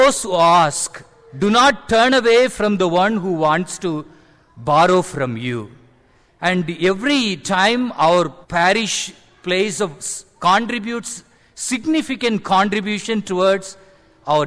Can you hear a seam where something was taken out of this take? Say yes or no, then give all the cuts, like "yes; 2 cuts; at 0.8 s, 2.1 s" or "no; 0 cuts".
yes; 2 cuts; at 6.3 s, 8.4 s